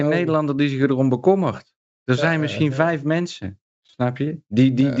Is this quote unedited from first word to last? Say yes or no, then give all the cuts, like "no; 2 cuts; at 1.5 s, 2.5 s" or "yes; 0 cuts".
yes; 0 cuts